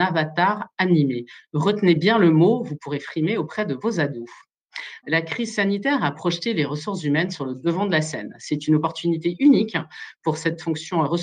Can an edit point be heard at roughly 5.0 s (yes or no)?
yes